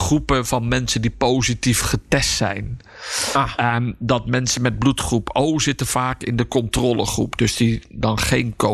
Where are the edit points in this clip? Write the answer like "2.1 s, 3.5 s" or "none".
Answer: none